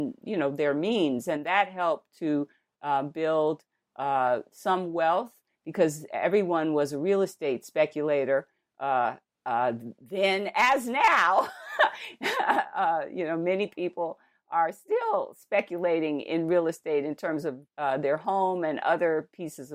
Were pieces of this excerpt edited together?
yes; 1 cut; at 17.7 s

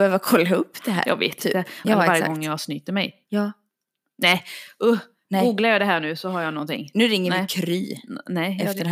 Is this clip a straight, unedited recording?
no; 1 cut; at 1.8 s

